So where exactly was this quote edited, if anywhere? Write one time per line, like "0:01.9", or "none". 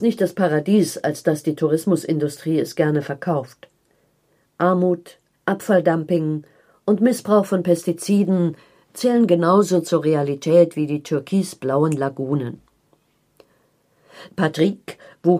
0:05.3
0:14.3